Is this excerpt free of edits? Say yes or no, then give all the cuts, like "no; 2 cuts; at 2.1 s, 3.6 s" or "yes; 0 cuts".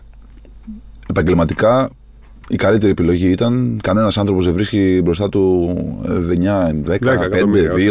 yes; 0 cuts